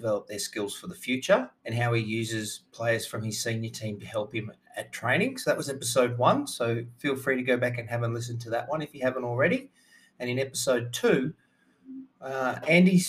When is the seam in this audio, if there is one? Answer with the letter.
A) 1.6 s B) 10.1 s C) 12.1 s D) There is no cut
A